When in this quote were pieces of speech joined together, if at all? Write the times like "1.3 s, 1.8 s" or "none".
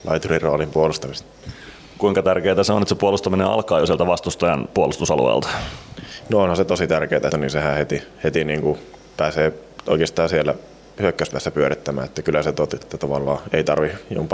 7.3 s, 12.8 s